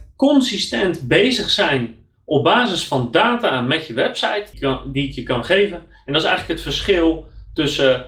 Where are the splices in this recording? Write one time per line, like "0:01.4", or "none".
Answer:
0:04.5